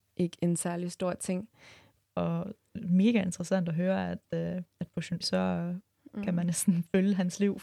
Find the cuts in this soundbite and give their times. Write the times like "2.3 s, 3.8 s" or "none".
2.0 s, 5.2 s